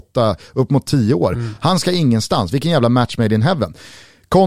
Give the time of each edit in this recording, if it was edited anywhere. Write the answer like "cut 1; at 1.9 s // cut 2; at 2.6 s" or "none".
none